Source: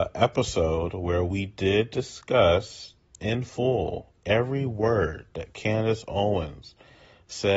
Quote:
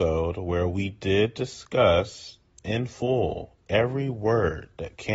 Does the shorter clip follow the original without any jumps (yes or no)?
yes